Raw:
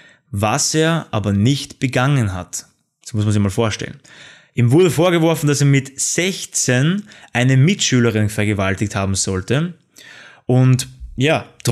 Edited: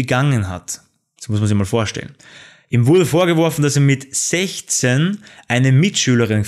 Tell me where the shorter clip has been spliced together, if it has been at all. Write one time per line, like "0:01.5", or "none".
none